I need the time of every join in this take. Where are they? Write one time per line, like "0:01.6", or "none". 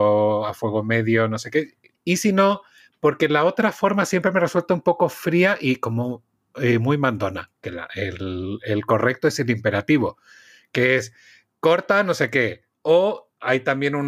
none